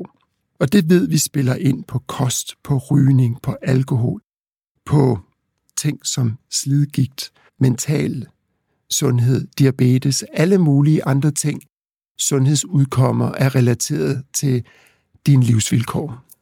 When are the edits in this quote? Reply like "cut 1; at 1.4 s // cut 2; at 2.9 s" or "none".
cut 1; at 7.5 s